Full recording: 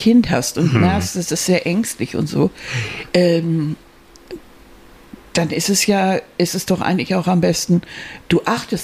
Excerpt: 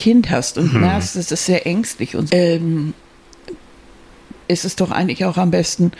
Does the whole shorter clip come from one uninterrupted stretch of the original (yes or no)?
no